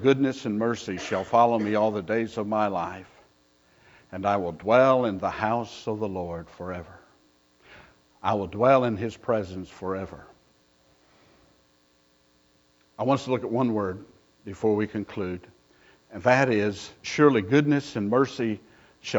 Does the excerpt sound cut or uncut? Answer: uncut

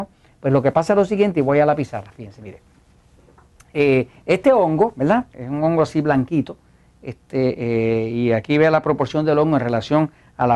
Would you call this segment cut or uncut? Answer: cut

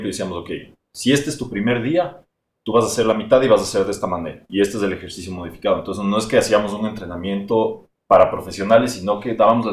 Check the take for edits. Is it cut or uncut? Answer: uncut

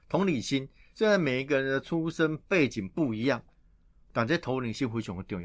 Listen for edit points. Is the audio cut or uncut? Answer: uncut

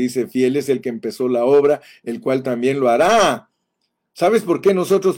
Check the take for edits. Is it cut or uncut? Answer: uncut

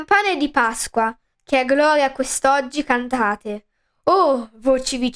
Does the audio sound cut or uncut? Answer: cut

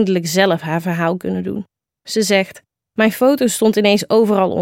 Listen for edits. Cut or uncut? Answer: uncut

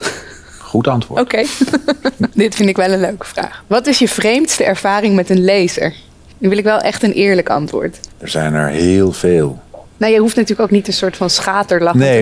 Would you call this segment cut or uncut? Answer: cut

